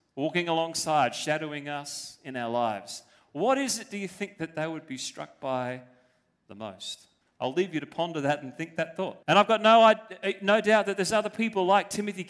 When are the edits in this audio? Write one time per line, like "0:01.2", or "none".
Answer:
0:07.2
0:09.2